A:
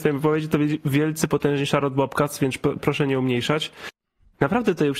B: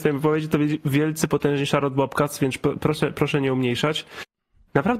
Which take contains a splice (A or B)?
A